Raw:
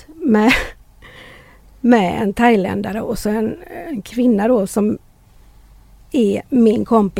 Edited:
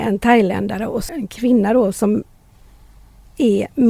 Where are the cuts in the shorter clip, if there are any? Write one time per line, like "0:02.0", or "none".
0:01.1